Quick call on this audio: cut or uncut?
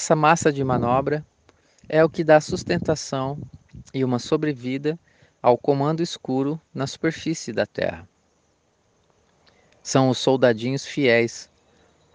uncut